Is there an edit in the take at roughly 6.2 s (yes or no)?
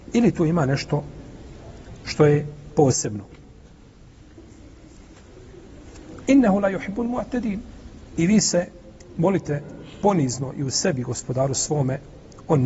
yes